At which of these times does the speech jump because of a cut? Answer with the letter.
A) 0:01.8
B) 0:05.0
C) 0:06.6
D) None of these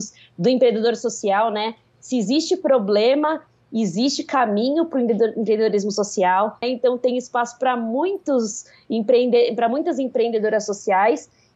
C